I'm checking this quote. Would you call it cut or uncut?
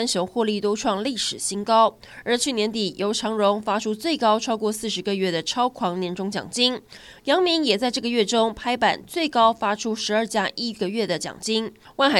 uncut